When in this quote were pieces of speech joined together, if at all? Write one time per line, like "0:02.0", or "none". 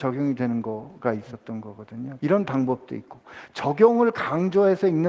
0:02.2